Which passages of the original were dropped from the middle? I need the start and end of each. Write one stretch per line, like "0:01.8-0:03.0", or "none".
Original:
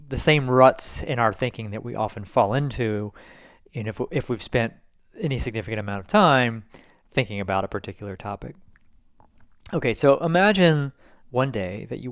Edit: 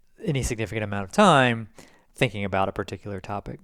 none